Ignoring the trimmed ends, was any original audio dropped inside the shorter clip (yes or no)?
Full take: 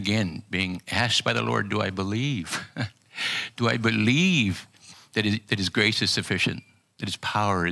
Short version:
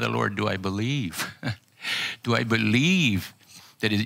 no